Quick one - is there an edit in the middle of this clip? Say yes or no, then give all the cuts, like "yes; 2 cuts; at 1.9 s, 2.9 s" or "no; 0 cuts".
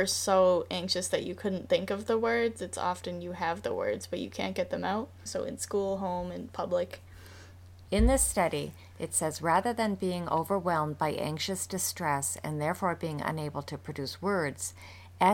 yes; 2 cuts; at 5.3 s, 7.9 s